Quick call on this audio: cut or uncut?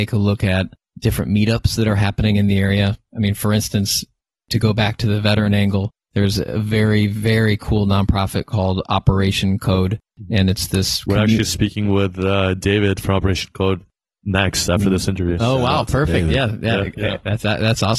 uncut